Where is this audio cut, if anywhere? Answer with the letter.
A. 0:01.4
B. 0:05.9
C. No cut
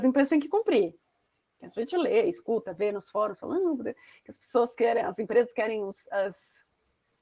A